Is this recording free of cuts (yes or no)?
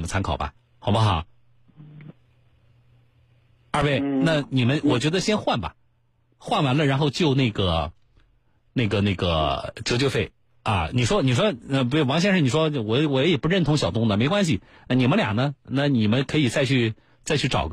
yes